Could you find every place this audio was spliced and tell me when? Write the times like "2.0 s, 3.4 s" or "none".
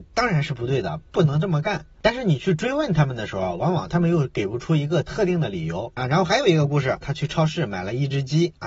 6.0 s, 7.0 s